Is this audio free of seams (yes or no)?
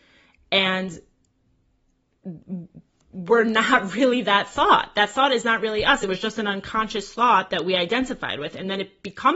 yes